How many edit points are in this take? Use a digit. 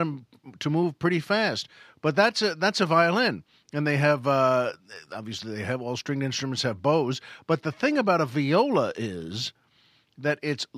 0